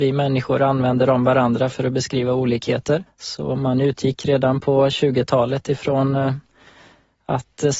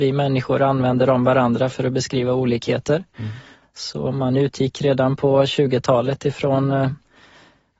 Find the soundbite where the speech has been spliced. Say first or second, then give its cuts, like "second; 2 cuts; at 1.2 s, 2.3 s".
first; 1 cut; at 3.1 s